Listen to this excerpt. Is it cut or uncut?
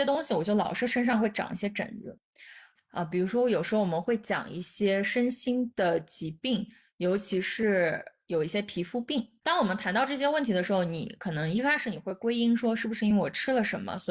cut